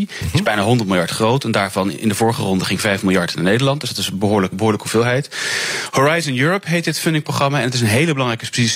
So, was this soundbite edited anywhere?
yes; 1 cut; at 4.5 s

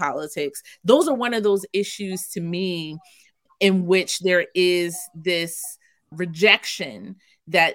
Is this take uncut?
yes; 0 cuts

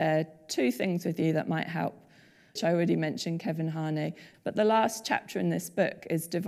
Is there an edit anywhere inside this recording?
yes; 2 cuts; at 2.6 s, 4.3 s

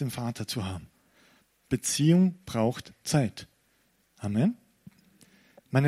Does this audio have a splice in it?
no; 0 cuts

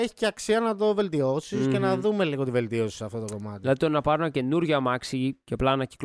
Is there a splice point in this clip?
no; 0 cuts

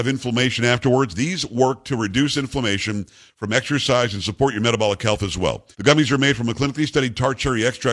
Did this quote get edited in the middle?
yes; 1 cut; at 5.7 s

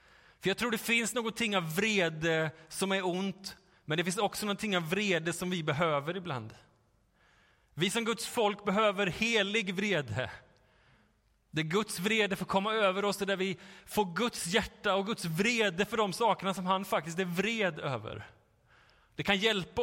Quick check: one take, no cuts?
yes; 0 cuts

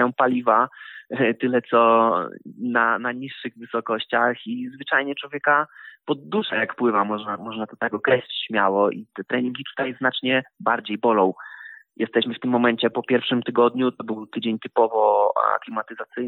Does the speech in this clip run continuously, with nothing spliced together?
yes; 0 cuts

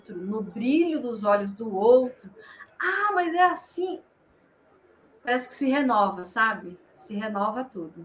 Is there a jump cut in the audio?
no; 0 cuts

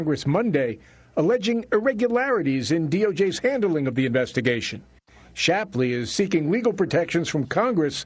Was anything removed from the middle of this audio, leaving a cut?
no; 0 cuts

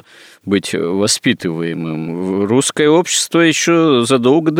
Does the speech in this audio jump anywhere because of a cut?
no; 0 cuts

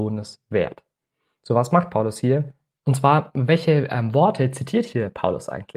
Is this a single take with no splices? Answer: no; 1 cut; at 2.8 s

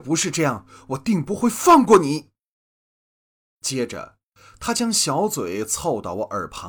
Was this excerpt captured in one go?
yes; 0 cuts

